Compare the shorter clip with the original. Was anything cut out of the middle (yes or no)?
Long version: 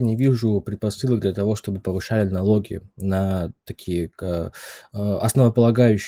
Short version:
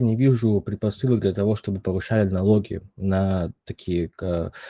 no